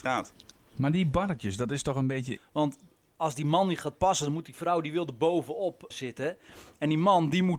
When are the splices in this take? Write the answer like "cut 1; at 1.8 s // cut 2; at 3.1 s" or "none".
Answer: cut 1; at 2.4 s // cut 2; at 5.9 s